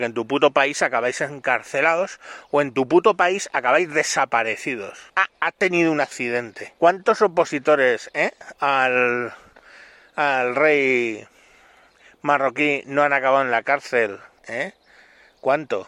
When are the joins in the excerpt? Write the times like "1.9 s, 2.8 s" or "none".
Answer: 5.1 s, 6.8 s, 14.4 s